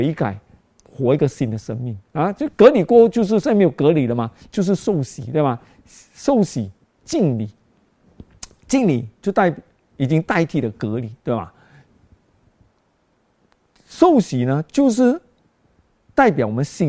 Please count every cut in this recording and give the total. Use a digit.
0